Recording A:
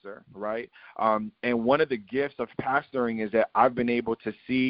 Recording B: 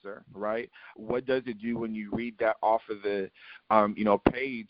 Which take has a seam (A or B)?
B